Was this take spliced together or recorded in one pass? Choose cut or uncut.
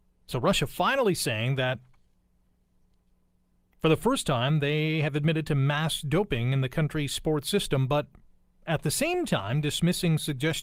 uncut